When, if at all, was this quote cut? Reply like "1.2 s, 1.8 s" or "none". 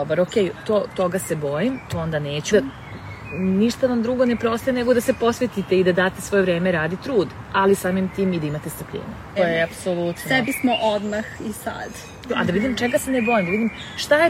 2.5 s, 9.4 s, 12.3 s